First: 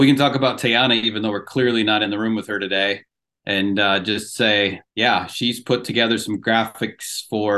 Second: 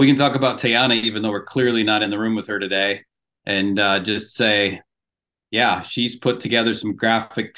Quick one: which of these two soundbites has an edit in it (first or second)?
first